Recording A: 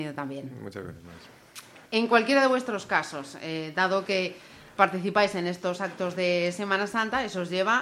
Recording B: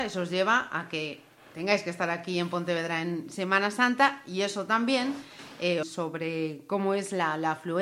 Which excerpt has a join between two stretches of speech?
B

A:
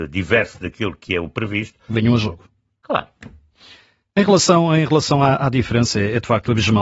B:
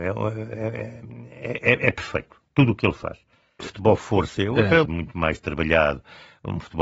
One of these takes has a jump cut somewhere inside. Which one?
B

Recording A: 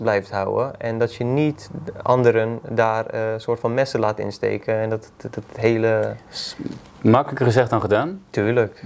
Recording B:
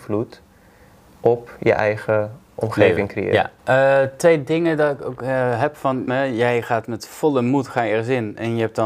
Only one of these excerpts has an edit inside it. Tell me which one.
B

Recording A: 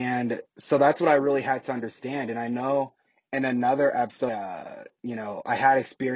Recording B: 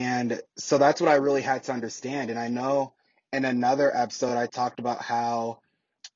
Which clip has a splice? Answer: A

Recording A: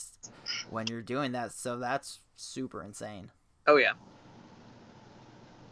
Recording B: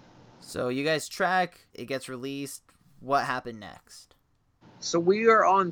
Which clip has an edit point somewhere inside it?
B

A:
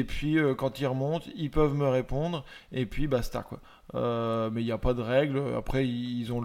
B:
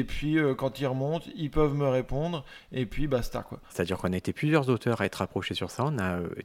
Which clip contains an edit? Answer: B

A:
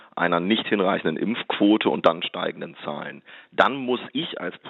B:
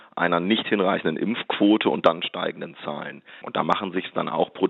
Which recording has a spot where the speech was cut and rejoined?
B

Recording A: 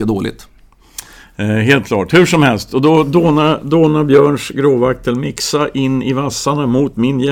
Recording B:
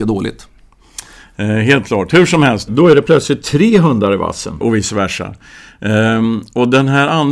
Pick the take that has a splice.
B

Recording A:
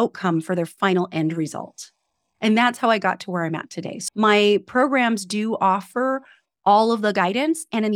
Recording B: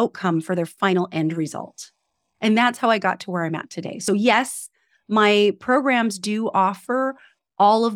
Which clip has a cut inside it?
A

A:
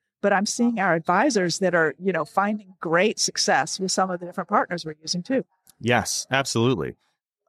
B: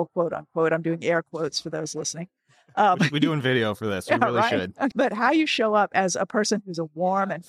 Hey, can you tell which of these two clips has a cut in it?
B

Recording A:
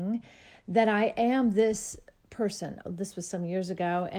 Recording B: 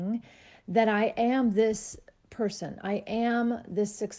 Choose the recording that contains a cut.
A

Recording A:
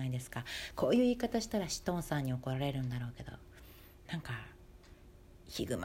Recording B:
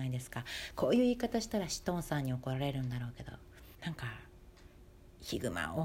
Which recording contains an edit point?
B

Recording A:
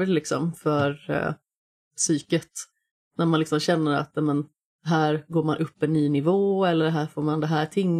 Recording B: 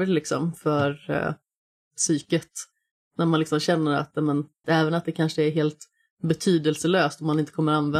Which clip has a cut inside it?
B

